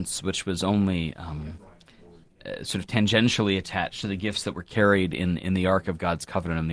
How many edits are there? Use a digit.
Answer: 0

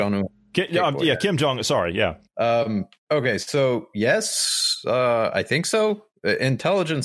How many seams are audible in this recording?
0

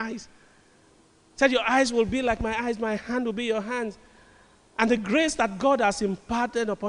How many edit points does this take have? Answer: 0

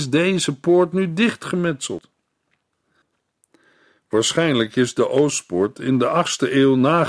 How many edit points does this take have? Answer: 0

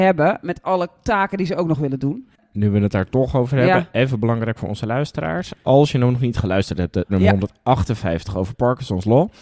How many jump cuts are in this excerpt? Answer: 1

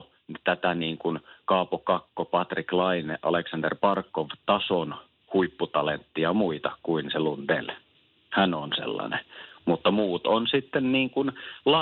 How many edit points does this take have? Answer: 0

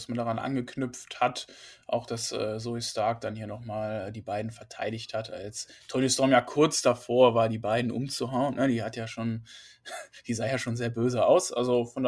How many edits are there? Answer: 0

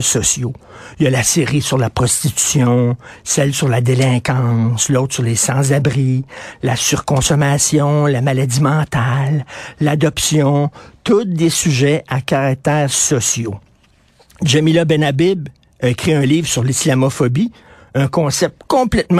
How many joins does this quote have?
0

